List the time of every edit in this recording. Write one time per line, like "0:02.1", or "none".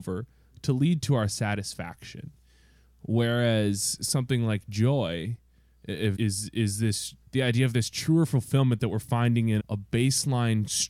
0:06.2
0:07.2
0:09.6